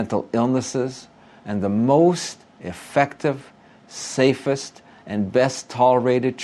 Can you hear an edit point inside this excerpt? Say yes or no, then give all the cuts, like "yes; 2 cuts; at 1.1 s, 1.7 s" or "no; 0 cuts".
no; 0 cuts